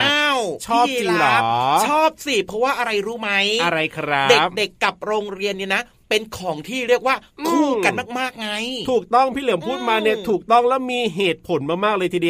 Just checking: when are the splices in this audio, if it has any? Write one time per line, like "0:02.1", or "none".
none